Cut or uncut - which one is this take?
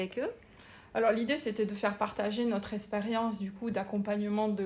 uncut